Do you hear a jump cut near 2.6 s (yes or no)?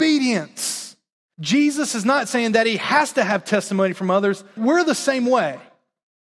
no